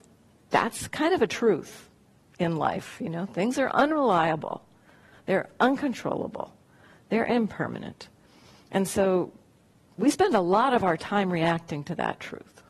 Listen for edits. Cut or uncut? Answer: uncut